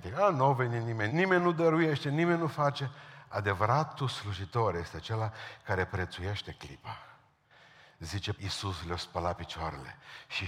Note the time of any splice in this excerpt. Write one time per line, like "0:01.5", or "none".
0:01.1
0:08.3